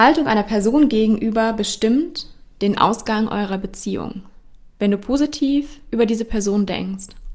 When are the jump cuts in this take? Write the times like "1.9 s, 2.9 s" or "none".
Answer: 4.7 s

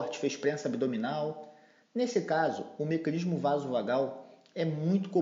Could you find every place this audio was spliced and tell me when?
none

